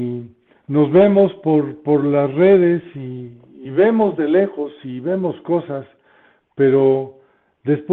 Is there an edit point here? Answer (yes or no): no